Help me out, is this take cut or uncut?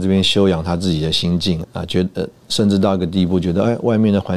cut